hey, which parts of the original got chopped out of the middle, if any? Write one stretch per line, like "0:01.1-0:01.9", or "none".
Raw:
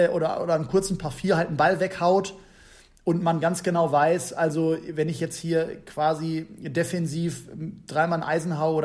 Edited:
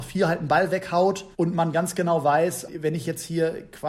0:02.4-0:03.0
0:04.3-0:04.8